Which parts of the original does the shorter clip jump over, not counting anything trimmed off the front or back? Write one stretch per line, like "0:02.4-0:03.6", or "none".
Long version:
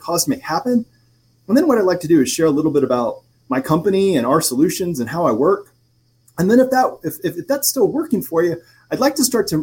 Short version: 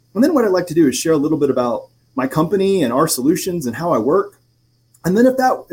none